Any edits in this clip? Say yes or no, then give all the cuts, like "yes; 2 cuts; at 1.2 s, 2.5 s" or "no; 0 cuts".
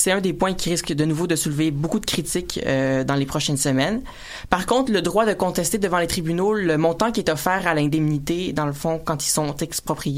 no; 0 cuts